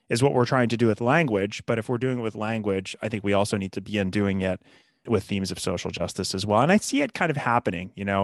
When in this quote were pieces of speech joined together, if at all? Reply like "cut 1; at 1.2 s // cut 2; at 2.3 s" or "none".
cut 1; at 5.1 s